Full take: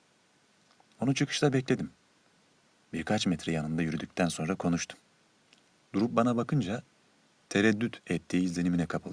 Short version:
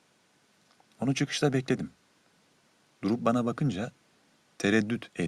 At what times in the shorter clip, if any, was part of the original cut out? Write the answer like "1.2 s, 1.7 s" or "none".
2.9 s